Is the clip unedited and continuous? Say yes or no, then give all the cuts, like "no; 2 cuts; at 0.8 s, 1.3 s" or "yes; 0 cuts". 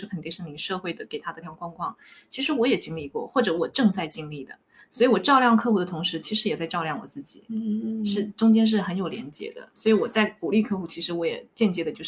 no; 1 cut; at 1.4 s